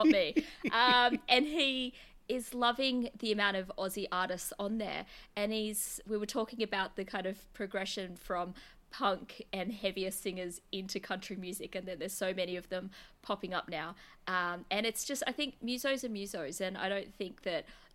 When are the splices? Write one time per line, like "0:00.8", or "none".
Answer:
none